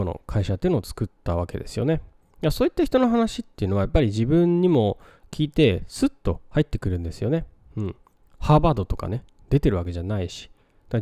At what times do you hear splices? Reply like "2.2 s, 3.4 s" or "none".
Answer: none